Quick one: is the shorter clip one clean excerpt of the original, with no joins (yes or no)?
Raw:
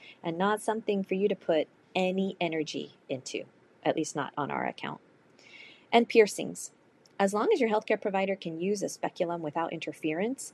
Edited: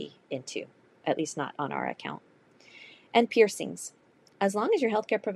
yes